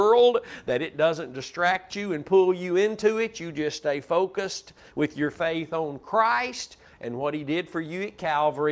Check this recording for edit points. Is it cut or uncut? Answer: uncut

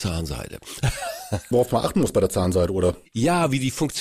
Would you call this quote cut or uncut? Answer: cut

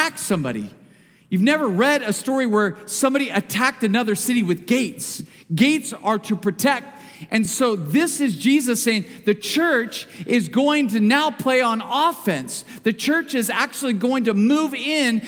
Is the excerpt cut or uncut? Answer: uncut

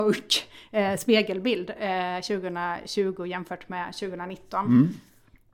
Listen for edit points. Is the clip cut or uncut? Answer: uncut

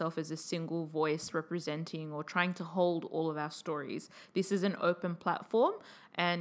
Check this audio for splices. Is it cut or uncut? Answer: uncut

